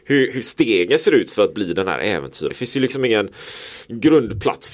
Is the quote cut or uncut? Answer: cut